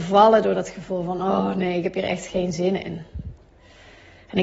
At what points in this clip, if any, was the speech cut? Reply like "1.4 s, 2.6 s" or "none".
none